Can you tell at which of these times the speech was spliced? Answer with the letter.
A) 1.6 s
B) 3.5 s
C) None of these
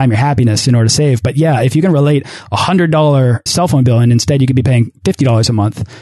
B